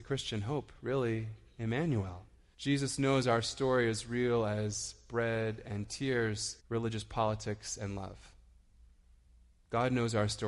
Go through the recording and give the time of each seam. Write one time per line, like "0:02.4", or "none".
0:02.5
0:06.6